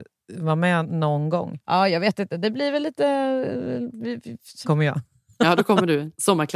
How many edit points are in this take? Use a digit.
2